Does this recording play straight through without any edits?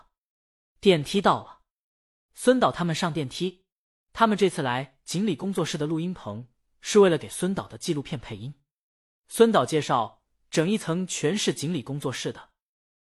no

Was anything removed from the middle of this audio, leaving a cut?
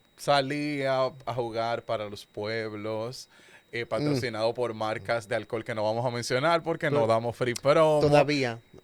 no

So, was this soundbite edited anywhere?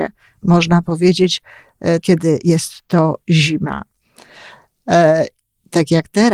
yes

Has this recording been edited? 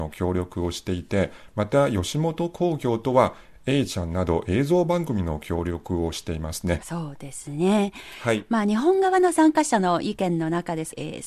yes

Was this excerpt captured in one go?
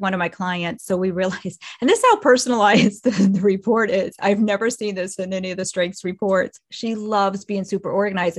no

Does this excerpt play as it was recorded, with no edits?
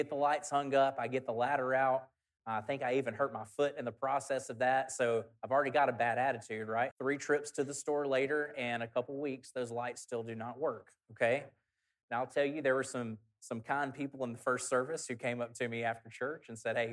no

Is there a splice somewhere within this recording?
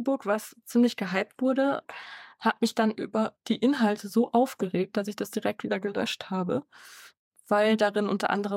no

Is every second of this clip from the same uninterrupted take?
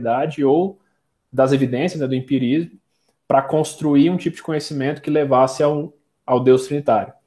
yes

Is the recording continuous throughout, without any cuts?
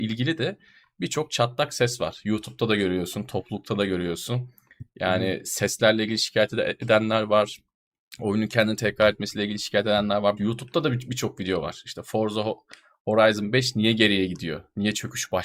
no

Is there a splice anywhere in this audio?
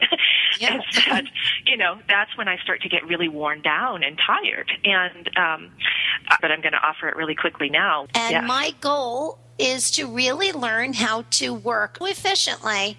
yes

